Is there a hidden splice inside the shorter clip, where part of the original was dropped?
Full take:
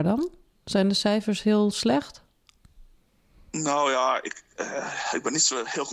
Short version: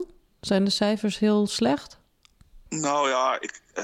yes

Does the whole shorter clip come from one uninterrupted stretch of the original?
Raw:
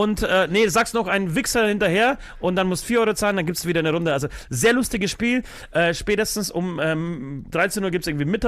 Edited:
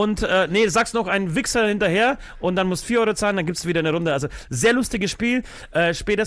yes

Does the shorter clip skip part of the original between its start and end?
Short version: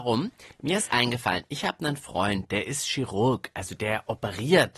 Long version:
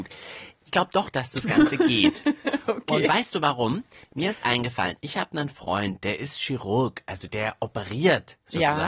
no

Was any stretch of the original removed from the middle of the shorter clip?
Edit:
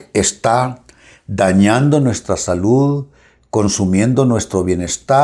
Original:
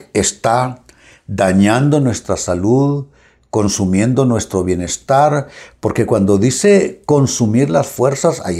no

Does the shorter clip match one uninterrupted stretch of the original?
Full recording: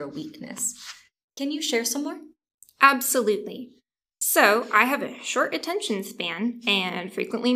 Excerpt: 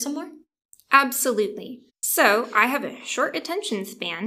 no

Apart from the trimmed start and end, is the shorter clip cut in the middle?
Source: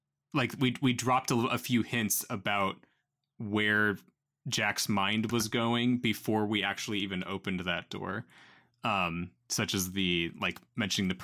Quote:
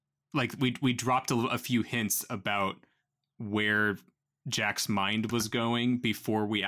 no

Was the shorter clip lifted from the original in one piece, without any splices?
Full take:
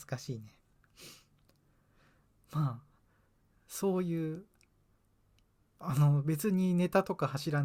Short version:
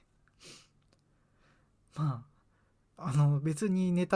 no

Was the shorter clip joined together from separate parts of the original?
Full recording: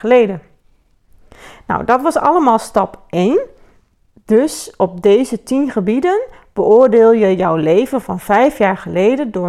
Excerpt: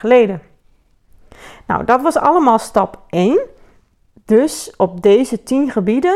no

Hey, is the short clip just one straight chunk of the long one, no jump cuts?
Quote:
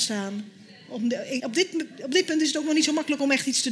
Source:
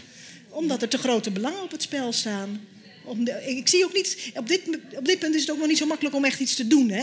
no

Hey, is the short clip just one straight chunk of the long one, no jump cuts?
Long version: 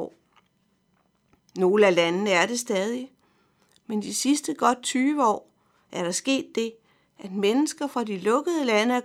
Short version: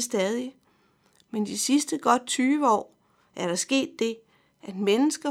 yes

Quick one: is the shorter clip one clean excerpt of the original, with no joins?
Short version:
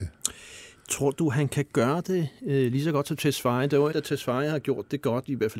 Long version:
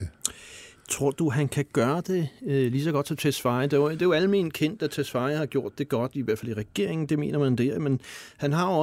no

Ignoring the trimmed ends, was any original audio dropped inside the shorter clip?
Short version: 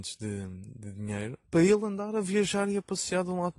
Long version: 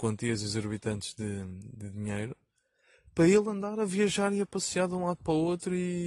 yes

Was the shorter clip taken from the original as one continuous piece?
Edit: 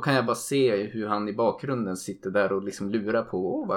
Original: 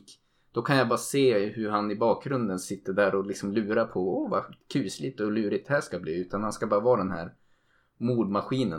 yes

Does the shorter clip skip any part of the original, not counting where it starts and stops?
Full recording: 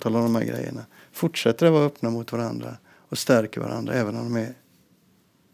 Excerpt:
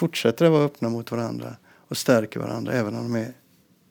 no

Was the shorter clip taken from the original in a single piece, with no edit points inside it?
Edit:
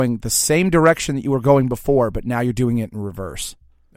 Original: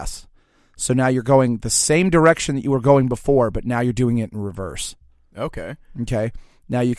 yes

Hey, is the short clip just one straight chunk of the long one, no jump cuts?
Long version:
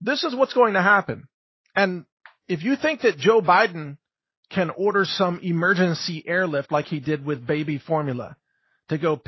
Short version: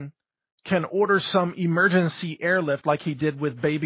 yes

